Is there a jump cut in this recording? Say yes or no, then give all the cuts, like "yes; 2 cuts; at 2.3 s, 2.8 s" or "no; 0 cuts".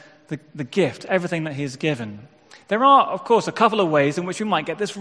no; 0 cuts